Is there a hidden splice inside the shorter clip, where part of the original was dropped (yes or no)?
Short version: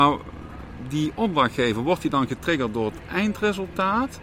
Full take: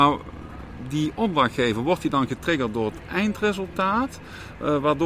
no